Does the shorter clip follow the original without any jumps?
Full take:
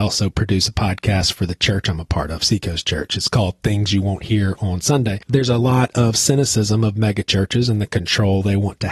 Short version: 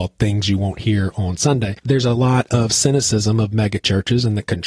yes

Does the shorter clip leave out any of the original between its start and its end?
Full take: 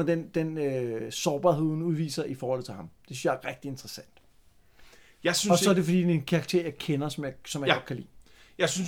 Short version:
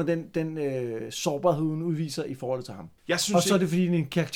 yes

